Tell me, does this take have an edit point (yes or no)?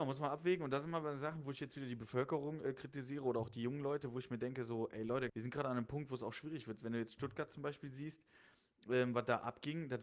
yes